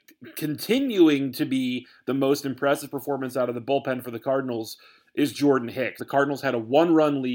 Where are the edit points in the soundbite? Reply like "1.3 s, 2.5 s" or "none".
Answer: 6.0 s

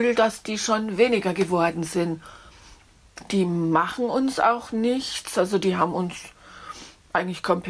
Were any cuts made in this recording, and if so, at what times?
3.2 s

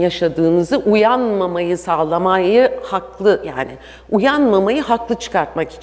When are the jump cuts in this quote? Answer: none

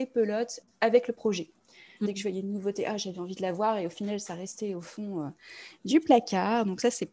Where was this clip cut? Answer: 2.0 s

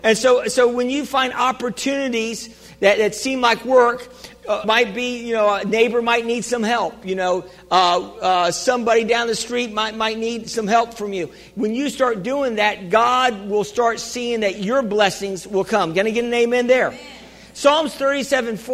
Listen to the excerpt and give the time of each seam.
4.6 s

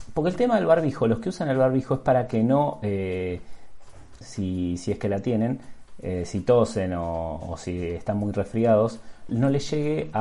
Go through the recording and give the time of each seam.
4.2 s, 9.3 s

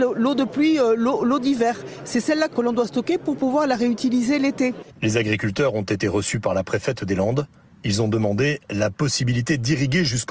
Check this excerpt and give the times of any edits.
2.5 s

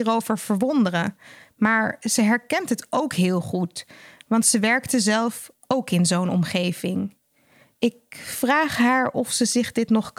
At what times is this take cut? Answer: none

